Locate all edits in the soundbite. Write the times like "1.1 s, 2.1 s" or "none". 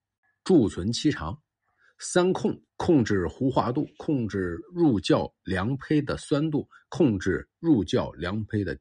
2.7 s

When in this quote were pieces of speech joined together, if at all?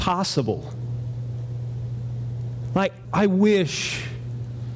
3.0 s

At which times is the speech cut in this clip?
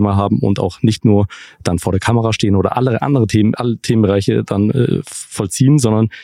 none

